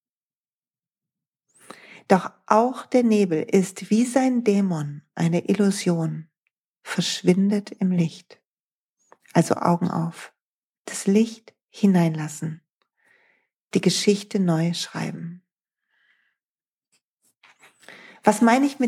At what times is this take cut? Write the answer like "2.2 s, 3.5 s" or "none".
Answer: 10.8 s